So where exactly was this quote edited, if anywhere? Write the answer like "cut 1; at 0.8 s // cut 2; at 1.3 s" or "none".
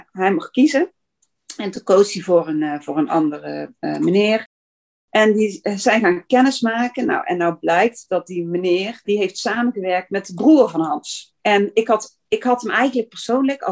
cut 1; at 9.0 s // cut 2; at 11.4 s

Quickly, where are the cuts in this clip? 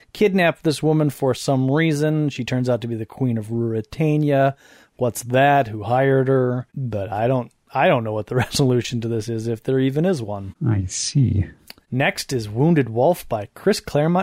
none

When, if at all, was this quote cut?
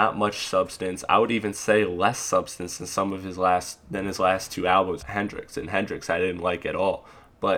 cut 1; at 5.0 s

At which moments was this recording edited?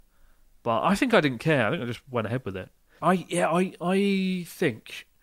cut 1; at 3.0 s

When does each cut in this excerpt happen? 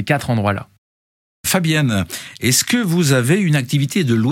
none

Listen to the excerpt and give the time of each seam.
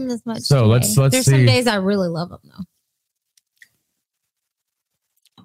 none

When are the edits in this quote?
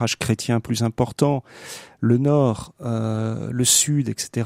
none

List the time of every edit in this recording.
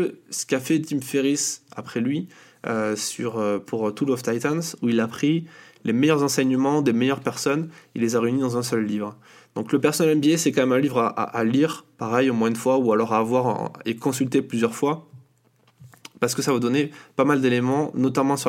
none

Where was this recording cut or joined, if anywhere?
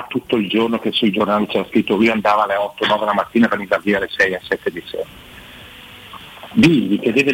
none

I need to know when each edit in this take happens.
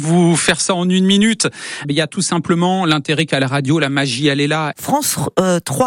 cut 1; at 1.8 s // cut 2; at 4.7 s

